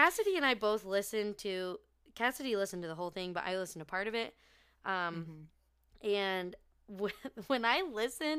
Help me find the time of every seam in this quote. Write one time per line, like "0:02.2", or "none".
none